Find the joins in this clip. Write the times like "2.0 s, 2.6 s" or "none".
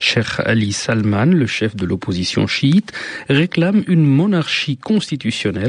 none